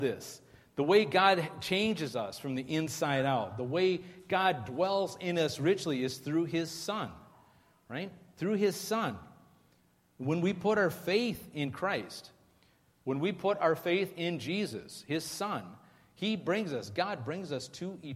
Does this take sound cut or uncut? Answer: uncut